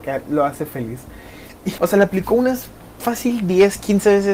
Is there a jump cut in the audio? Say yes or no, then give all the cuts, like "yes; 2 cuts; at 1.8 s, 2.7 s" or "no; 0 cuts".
yes; 1 cut; at 1.8 s